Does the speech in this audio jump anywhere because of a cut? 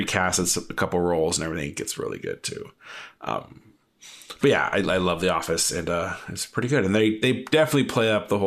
no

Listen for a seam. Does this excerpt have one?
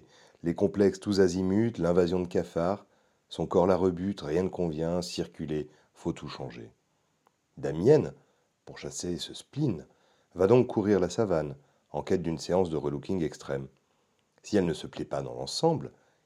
no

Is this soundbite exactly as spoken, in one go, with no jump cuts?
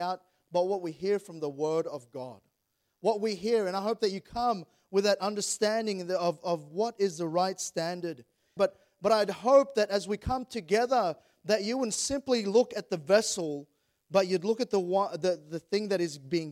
no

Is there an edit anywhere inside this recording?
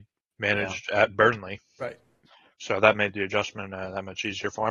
no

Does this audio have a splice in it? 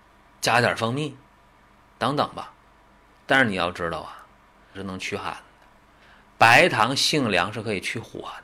yes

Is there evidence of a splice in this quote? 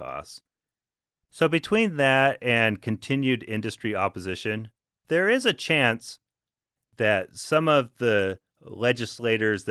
no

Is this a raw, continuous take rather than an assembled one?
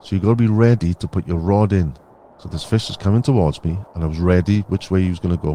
no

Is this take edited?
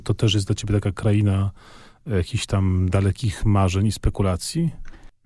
no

